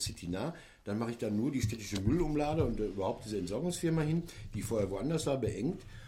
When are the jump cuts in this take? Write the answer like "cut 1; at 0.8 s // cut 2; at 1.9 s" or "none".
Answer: none